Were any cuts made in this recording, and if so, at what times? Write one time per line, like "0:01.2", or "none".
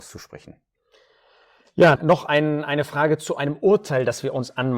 0:02.0